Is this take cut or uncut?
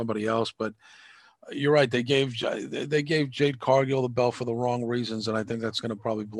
uncut